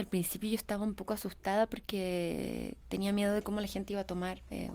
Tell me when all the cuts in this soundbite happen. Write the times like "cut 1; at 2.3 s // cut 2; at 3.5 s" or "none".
none